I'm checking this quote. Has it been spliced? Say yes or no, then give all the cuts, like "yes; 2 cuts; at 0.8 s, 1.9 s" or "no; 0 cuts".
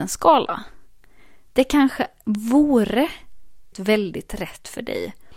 yes; 1 cut; at 3.7 s